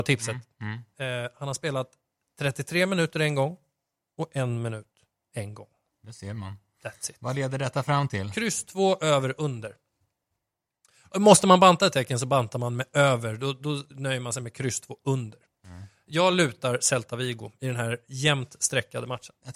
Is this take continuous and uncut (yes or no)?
yes